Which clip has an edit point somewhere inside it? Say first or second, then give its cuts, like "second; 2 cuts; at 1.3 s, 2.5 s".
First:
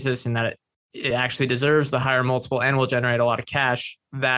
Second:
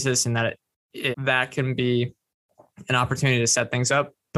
second; 1 cut; at 1.1 s